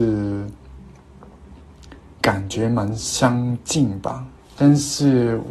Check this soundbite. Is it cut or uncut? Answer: cut